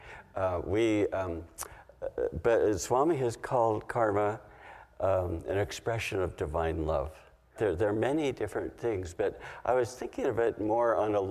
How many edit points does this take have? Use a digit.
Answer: 1